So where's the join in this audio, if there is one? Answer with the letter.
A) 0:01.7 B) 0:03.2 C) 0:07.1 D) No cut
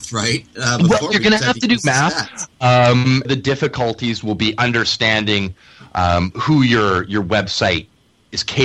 B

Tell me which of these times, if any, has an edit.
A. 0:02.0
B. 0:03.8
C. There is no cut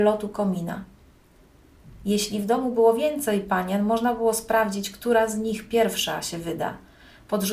C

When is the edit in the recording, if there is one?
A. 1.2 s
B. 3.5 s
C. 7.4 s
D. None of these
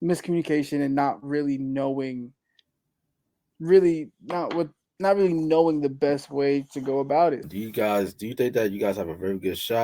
C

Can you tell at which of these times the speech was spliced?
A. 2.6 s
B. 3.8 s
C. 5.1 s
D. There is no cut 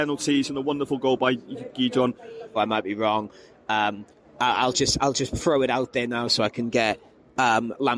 A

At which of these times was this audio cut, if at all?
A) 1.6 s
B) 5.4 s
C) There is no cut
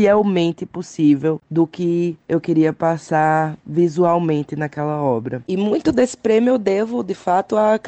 B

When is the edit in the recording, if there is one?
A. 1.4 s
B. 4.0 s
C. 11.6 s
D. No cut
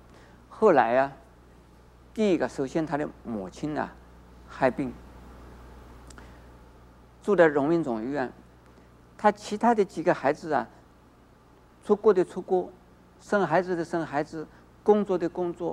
D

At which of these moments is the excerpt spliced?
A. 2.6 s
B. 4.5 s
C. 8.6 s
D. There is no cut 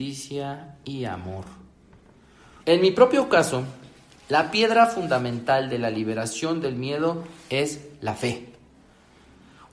A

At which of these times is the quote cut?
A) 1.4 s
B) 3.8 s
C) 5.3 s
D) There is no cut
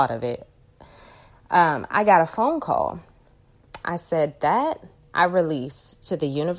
B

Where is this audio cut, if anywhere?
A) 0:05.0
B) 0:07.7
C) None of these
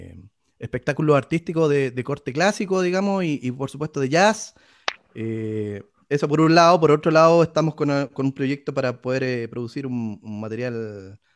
A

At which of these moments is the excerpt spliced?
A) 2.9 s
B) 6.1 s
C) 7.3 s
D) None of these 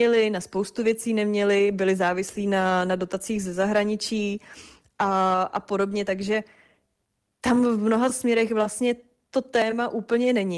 D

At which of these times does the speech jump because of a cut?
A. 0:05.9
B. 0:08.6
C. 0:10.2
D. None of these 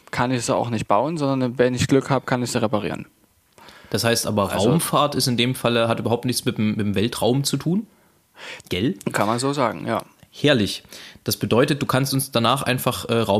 B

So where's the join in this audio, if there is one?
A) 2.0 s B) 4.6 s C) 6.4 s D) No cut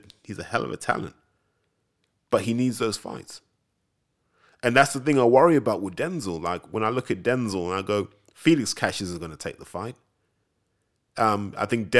D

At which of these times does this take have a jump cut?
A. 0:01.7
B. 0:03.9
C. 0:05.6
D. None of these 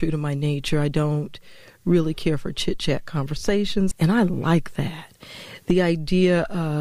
B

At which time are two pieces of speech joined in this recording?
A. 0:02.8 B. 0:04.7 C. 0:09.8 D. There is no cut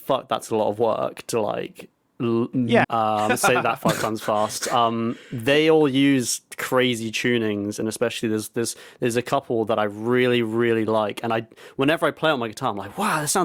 A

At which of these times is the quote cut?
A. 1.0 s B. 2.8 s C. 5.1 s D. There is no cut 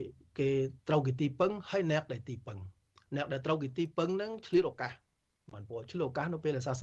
D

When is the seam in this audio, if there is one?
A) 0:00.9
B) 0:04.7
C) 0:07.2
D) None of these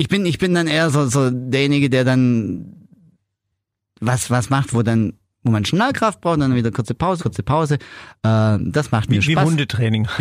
C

